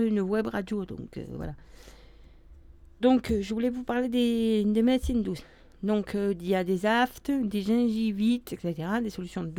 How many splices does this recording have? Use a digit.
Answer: 1